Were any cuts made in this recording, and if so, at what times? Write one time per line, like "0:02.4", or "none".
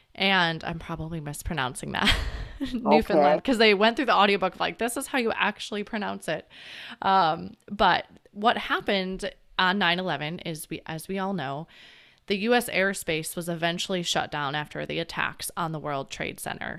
none